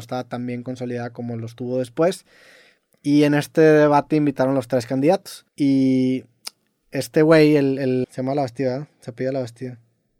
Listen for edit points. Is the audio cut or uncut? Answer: cut